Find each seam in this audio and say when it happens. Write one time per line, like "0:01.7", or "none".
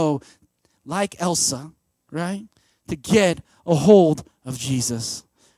none